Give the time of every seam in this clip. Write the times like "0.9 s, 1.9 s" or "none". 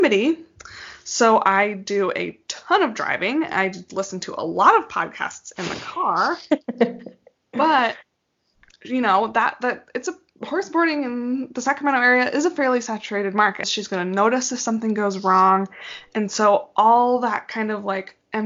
13.6 s